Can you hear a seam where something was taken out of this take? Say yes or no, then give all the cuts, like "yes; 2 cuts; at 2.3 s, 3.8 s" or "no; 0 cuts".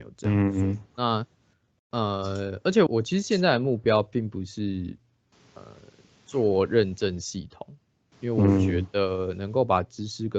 yes; 2 cuts; at 0.9 s, 2.9 s